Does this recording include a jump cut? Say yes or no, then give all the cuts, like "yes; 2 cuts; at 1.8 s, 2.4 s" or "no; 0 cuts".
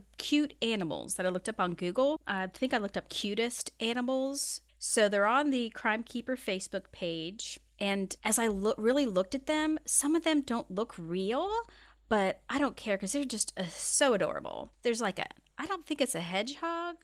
no; 0 cuts